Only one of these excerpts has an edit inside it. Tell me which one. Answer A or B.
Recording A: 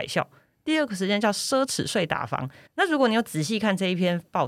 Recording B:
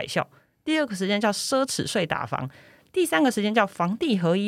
A